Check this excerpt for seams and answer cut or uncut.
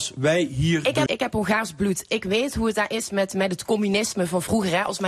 cut